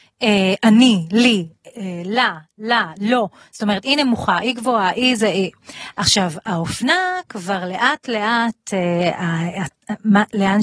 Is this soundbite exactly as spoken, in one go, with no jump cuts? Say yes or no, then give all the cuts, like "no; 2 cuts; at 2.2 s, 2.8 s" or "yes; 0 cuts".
no; 1 cut; at 5.9 s